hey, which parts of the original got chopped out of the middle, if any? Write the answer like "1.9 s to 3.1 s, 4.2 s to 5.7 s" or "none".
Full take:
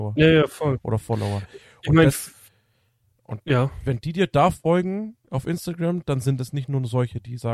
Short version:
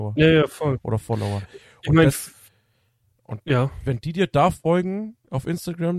none